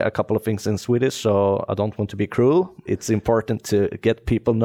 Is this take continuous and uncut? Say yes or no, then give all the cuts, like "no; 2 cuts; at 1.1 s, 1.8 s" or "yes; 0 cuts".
no; 1 cut; at 2.9 s